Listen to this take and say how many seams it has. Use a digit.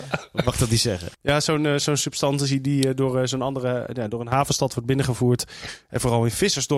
1